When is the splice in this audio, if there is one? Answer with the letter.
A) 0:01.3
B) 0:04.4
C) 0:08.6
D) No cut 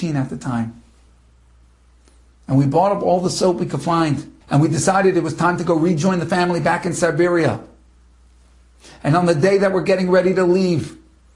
B